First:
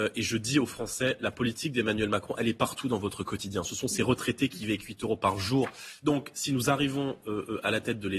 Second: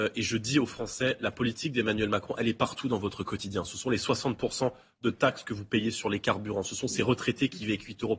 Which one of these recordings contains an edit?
first; 2 cuts; at 3.6 s, 6.0 s

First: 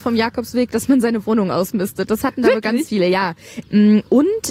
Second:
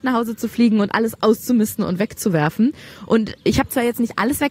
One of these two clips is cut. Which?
first; 1 cut; at 3.6 s

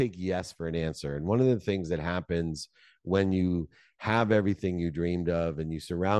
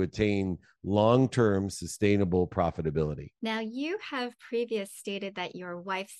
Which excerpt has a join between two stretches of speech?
second; 1 cut; at 3.4 s

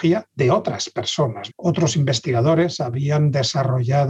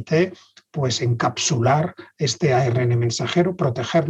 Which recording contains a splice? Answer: first; 1 cut; at 1.5 s

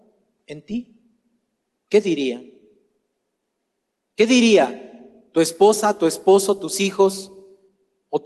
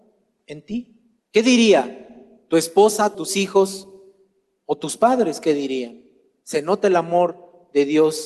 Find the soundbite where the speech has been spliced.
second; 2 cuts; at 1.2 s, 3.1 s

